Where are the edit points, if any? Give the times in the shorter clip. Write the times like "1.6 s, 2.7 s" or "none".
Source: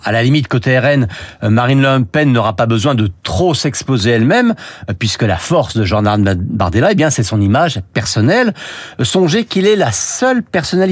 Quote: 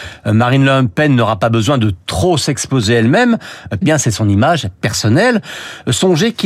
3.8 s